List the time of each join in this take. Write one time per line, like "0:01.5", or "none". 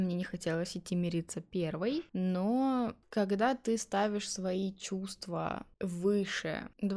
0:05.7